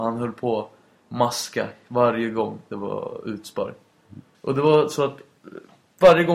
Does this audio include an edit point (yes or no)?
yes